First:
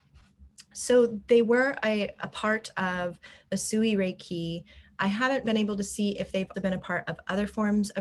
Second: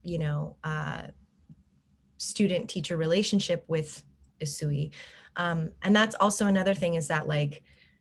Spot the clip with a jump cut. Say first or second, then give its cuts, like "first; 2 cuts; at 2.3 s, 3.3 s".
first; 2 cuts; at 5.4 s, 6.5 s